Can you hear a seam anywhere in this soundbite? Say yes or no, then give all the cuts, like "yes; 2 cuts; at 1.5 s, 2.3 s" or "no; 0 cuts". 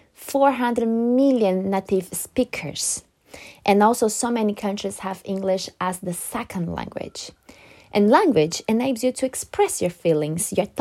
no; 0 cuts